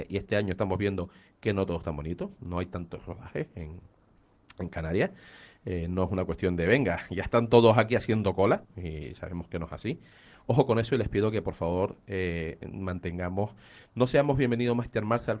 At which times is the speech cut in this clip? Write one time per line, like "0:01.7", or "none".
0:08.6